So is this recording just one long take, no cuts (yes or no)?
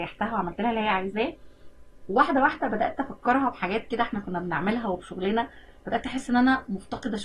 yes